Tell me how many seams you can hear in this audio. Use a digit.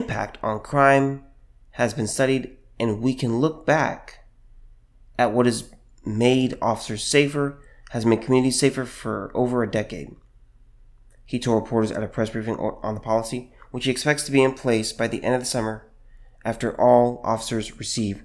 0